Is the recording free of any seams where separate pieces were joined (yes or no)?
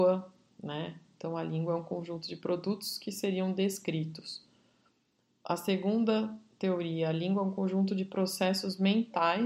yes